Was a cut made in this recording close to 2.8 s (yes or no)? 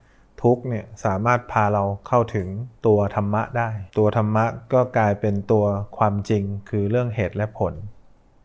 yes